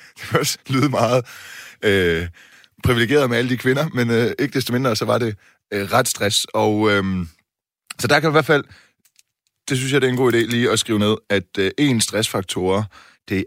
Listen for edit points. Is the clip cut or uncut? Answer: uncut